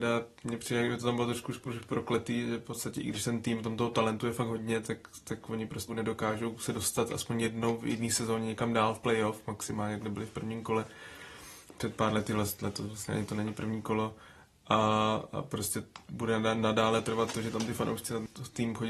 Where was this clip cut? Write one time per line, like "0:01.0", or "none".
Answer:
0:05.9